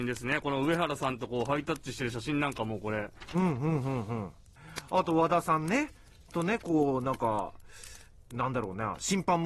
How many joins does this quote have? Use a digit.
0